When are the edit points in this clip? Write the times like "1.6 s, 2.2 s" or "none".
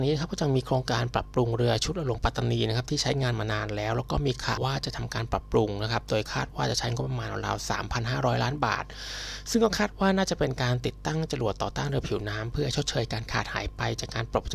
4.6 s